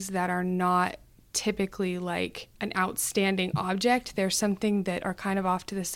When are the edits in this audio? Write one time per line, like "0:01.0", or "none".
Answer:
0:02.5